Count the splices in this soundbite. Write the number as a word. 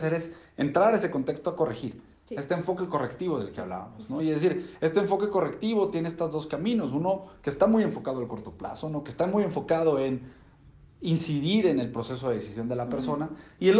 zero